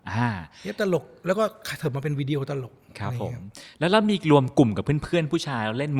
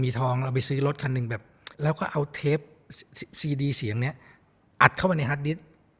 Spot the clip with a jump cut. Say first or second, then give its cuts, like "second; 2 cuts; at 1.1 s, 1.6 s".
second; 1 cut; at 1.7 s